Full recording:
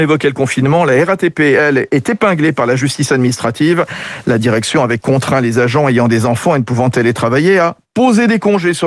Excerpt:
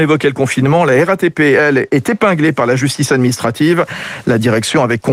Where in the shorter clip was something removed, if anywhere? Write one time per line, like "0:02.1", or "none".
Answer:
none